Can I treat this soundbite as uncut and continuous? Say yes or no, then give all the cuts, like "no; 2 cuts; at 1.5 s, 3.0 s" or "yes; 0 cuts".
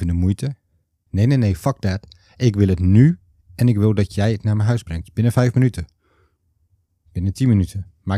no; 1 cut; at 1.1 s